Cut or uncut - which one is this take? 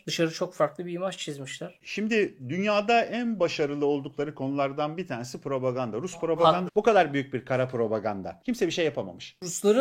cut